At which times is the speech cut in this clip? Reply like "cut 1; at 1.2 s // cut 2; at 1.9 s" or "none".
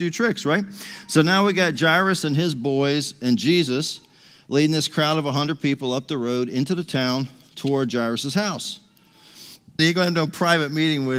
cut 1; at 9.8 s